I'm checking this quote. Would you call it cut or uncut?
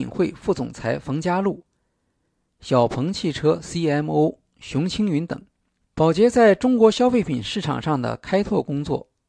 cut